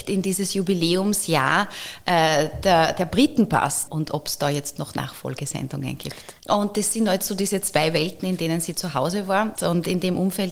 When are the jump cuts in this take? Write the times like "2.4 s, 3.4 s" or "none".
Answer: 3.9 s, 6.4 s, 9.6 s